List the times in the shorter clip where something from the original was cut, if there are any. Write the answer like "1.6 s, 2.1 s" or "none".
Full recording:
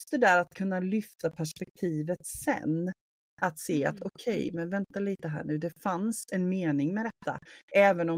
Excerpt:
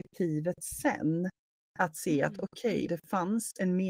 2.9 s